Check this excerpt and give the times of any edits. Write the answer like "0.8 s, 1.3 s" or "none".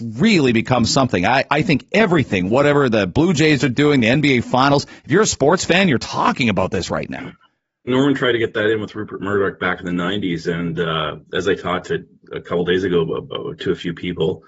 7.9 s